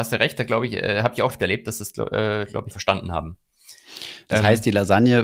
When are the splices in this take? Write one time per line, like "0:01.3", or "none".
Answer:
0:01.3
0:02.7